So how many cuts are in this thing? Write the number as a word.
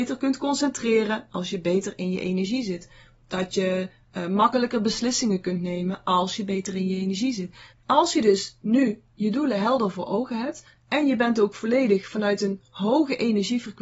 one